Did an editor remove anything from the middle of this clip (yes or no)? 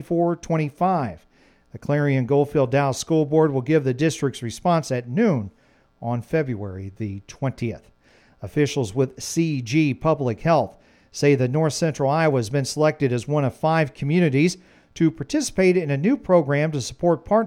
no